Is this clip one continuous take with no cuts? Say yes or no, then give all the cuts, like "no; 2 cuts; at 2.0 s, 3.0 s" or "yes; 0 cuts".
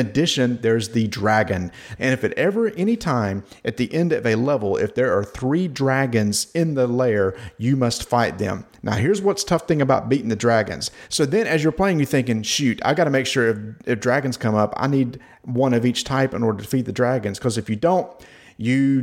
no; 2 cuts; at 2.0 s, 11.1 s